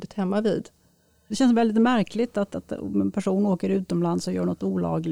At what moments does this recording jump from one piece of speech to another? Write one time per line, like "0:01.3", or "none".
0:01.3